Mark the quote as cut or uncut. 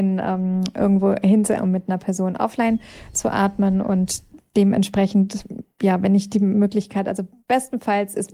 cut